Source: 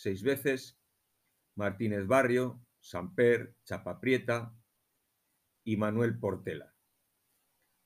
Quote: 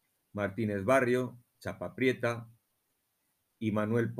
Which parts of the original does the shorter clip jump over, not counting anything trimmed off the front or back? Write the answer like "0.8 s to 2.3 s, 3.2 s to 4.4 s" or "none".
2.8 s to 3.6 s